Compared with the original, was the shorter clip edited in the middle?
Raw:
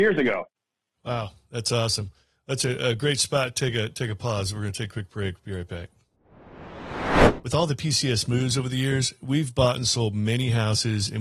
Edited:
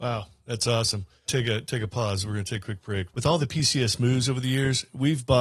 yes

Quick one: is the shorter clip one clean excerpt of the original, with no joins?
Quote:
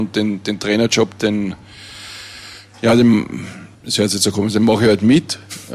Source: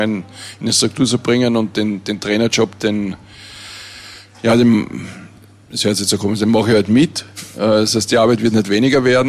no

